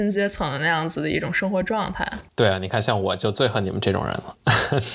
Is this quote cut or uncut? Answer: cut